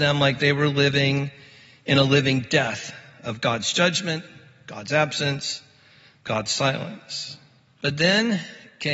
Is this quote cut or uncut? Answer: uncut